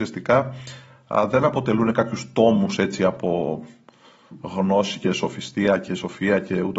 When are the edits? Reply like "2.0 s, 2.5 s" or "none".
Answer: none